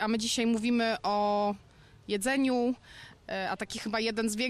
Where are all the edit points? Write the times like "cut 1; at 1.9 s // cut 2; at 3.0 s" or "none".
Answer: none